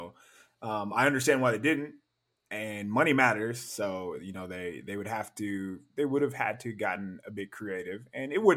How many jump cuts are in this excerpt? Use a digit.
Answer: 0